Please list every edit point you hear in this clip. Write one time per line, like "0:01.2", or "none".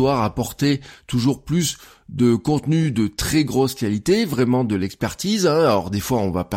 none